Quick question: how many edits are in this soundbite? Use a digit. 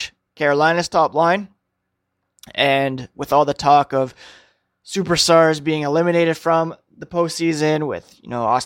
0